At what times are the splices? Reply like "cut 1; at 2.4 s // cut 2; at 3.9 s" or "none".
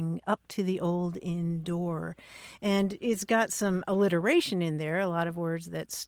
none